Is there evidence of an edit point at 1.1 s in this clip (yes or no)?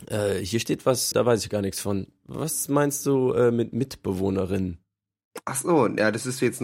yes